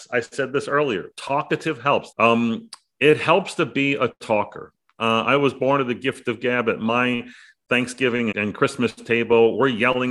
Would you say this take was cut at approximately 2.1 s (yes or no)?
yes